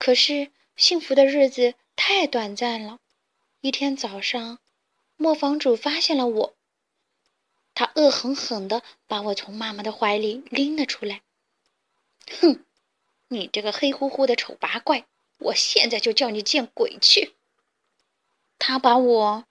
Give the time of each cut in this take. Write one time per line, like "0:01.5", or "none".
none

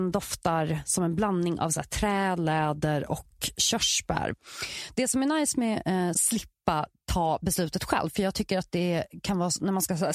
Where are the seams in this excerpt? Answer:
0:06.1

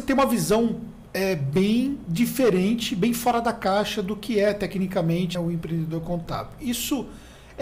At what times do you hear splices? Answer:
0:05.3

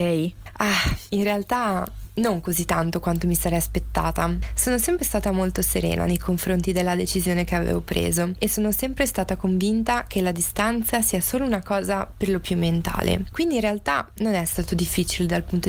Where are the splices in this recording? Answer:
0:01.1

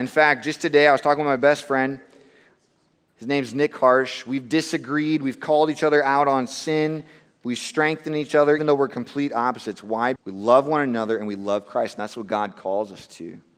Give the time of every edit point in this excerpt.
0:08.6
0:10.2

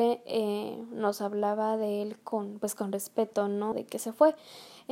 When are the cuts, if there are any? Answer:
0:03.7

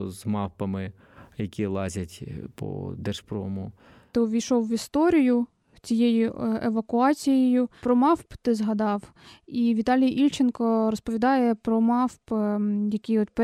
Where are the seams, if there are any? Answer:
0:04.1

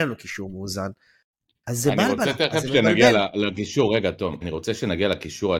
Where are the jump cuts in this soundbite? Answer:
0:04.4

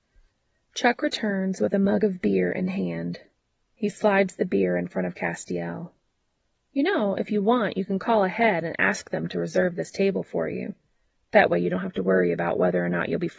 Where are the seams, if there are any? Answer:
0:03.6

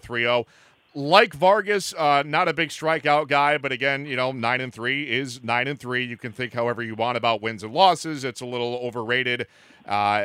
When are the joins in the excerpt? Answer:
none

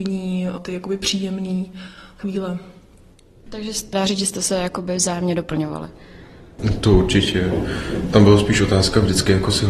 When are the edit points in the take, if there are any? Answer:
none

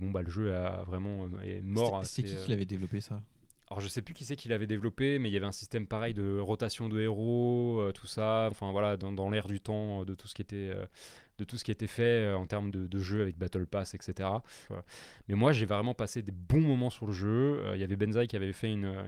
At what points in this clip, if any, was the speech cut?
0:08.5
0:12.7
0:14.7

